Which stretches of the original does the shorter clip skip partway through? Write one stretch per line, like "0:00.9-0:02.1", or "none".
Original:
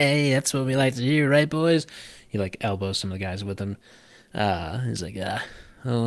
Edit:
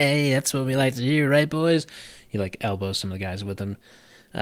none